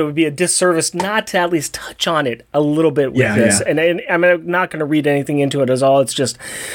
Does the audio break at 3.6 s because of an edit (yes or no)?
no